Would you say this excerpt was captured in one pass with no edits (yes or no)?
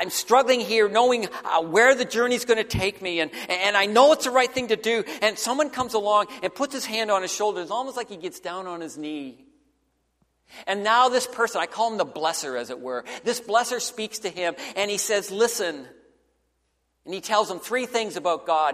yes